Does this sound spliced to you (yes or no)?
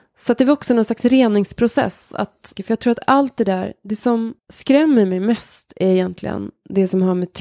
yes